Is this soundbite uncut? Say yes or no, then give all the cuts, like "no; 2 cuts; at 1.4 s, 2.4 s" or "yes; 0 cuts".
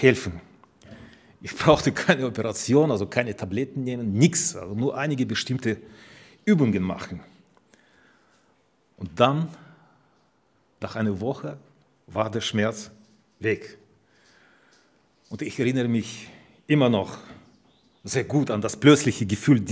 yes; 0 cuts